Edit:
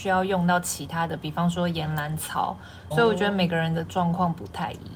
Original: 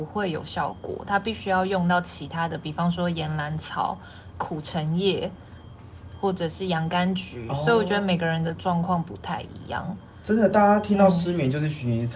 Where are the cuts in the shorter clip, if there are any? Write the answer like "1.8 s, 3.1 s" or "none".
2.9 s